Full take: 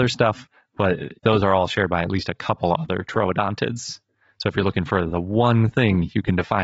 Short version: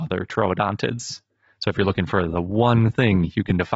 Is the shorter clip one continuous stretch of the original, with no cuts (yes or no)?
yes